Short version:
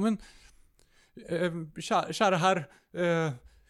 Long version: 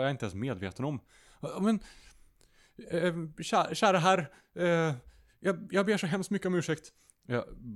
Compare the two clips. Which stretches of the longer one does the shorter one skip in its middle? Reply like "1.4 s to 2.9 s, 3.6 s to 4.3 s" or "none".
none